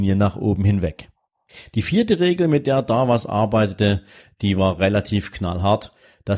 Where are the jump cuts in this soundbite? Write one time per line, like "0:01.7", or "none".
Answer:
none